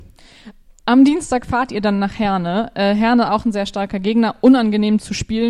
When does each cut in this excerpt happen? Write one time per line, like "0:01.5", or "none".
none